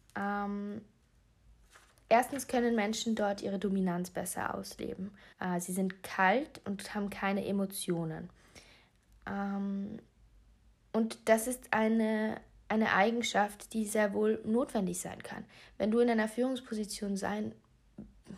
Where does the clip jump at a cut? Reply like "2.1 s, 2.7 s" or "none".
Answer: 5.3 s

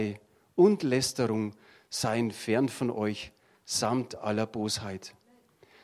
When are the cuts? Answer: none

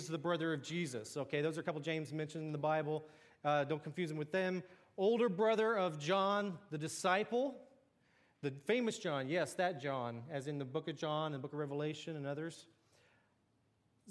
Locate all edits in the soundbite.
none

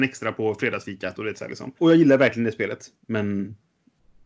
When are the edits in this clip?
3.0 s

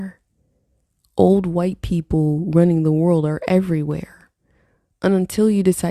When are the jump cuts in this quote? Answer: none

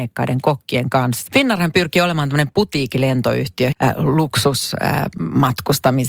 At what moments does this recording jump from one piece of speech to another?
1.3 s, 3.7 s

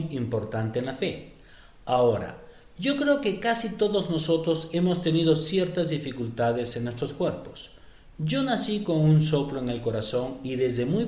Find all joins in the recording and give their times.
none

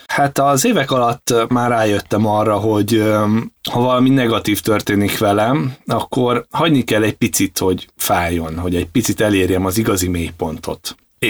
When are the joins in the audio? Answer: 3.6 s

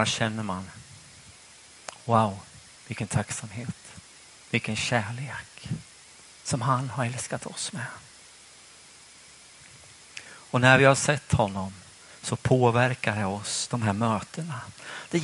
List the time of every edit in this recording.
none

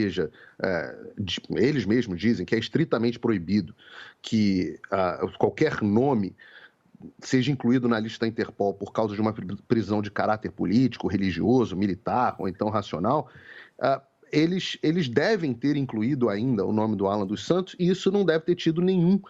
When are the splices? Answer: none

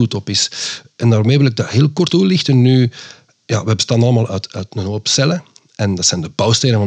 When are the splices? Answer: 2.1 s

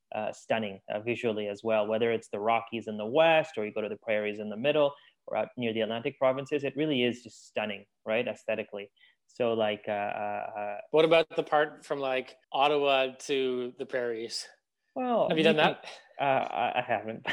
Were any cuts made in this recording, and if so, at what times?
12.4 s, 15.3 s

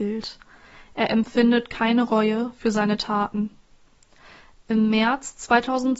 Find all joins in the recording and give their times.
none

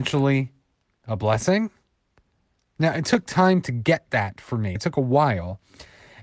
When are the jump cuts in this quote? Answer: 4.8 s

